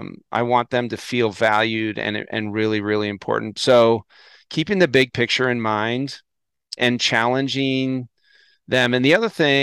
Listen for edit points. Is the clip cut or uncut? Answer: cut